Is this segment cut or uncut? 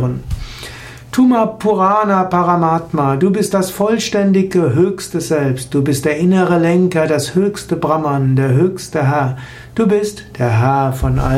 uncut